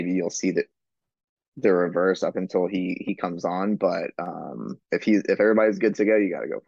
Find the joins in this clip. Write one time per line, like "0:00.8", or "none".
0:04.8